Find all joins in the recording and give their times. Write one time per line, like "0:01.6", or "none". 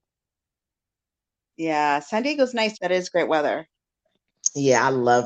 0:02.7

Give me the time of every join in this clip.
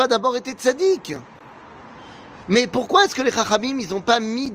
0:02.4

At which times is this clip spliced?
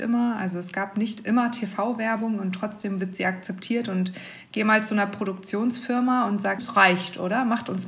0:06.6

